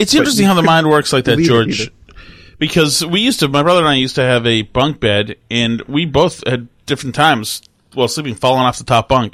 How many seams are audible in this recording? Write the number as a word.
zero